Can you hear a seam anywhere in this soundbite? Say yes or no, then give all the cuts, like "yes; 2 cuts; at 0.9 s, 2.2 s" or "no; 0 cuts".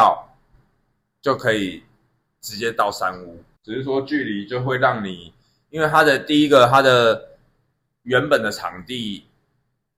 yes; 1 cut; at 3.6 s